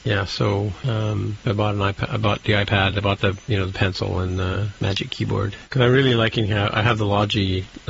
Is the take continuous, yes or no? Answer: yes